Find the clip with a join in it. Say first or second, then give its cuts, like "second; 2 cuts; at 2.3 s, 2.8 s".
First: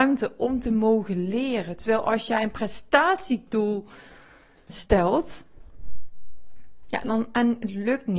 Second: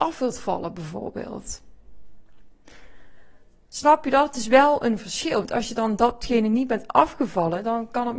first; 1 cut; at 4.7 s